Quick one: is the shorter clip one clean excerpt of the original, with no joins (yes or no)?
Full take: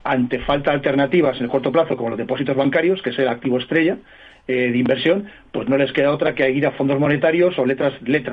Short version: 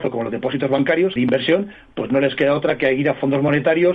no